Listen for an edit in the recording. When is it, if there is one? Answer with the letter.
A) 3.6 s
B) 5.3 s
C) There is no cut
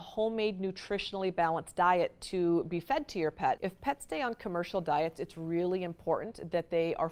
A